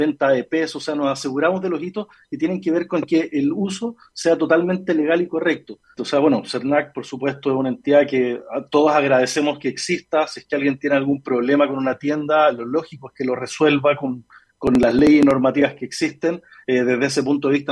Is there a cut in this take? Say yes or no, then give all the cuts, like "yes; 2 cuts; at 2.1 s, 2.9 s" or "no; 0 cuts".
yes; 1 cut; at 6.0 s